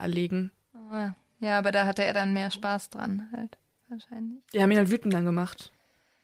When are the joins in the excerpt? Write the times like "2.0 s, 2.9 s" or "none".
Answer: none